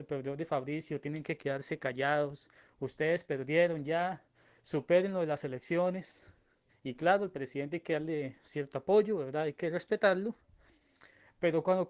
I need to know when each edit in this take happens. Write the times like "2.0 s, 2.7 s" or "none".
6.7 s